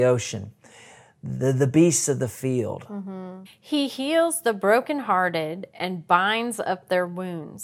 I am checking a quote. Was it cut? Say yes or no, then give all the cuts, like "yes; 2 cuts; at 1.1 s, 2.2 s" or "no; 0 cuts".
yes; 1 cut; at 3.5 s